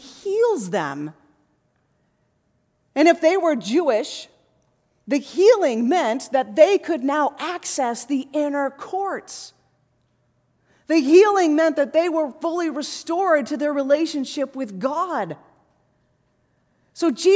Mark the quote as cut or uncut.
uncut